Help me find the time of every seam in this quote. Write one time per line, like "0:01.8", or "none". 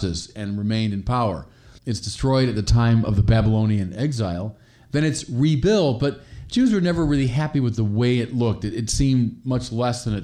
0:01.8